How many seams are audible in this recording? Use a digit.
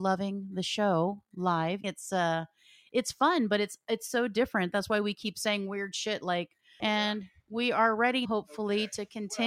3